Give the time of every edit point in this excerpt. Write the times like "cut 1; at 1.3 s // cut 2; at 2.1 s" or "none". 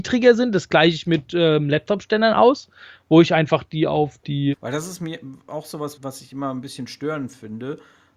cut 1; at 4.5 s // cut 2; at 6.0 s